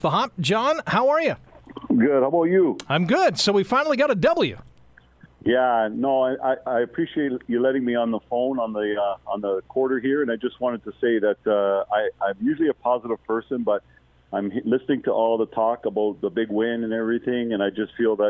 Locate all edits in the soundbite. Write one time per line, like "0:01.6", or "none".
none